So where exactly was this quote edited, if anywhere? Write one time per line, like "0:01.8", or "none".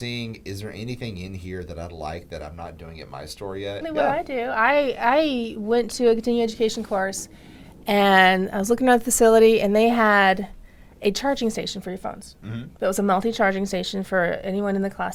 0:03.8